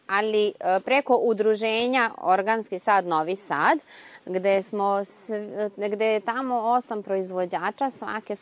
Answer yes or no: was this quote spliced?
no